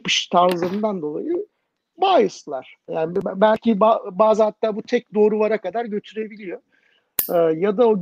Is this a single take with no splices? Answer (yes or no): no